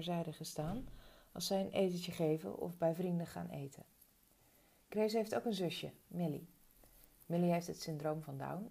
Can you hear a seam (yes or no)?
no